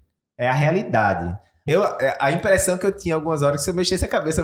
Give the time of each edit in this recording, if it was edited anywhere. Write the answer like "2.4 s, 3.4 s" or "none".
1.7 s